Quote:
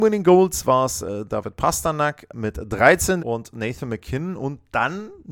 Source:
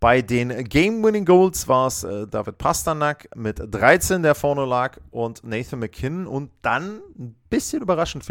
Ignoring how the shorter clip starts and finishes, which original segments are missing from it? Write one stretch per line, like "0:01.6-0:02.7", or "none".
0:04.2-0:05.1